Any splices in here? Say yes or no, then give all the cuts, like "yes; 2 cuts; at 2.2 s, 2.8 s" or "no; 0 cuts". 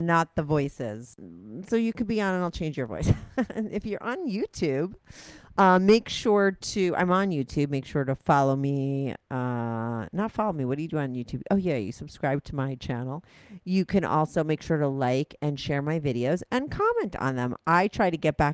no; 0 cuts